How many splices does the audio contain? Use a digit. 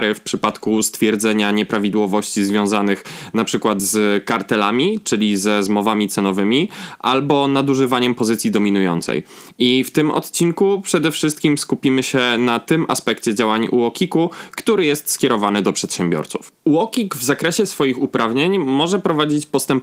0